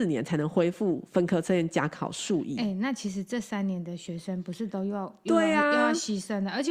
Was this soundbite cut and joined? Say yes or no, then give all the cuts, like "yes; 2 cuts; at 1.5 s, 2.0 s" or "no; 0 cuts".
no; 0 cuts